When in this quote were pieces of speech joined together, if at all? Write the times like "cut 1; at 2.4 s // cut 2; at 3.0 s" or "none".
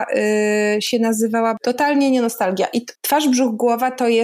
cut 1; at 3.0 s